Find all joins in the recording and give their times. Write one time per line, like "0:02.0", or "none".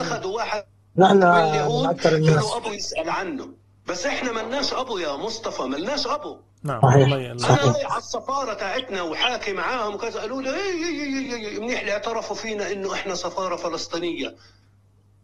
none